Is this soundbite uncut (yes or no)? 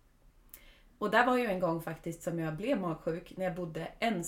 yes